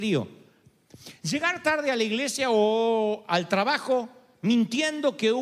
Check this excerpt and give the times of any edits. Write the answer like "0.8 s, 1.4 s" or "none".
none